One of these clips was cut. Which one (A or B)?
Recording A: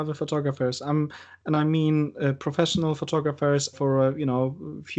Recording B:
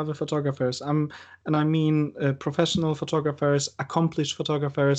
A